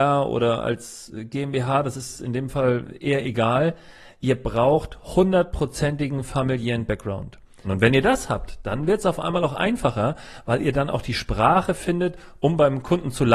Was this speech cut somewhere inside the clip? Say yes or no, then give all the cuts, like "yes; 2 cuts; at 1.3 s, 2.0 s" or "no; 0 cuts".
yes; 1 cut; at 7.6 s